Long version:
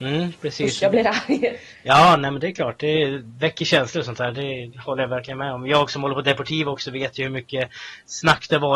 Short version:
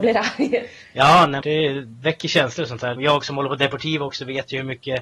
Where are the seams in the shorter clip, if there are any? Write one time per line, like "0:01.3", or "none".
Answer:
0:01.4
0:03.0